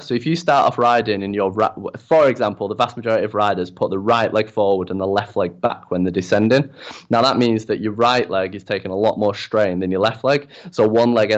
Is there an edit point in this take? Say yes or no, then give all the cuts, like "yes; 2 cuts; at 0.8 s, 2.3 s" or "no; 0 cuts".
no; 0 cuts